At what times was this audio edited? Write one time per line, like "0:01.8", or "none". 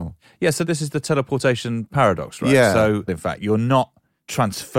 0:03.1